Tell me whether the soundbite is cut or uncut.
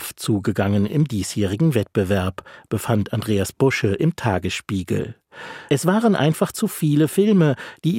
cut